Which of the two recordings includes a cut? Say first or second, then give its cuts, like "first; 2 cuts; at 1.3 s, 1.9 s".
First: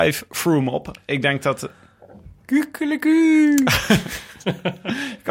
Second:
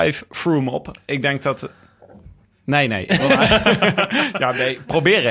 second; 1 cut; at 2.4 s